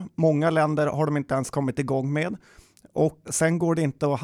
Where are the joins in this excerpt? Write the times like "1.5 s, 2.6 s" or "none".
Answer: 3.2 s

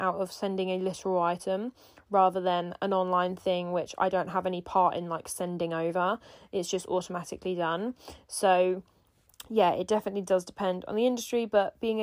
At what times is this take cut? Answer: none

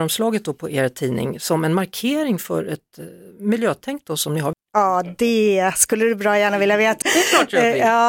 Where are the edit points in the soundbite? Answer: 4.5 s, 7.0 s

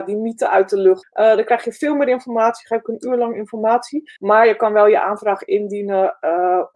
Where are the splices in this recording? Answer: 1.0 s, 4.2 s

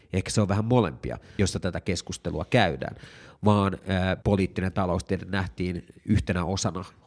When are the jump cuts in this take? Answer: 1.4 s, 4.2 s

